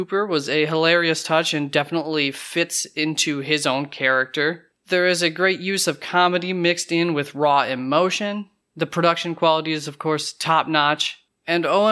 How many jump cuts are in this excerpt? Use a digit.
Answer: 0